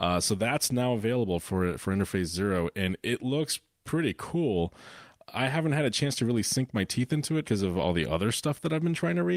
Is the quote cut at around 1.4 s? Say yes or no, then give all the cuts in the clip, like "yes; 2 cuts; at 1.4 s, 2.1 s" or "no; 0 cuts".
no; 1 cut; at 7.4 s